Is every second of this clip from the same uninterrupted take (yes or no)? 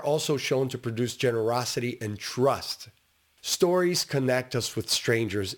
yes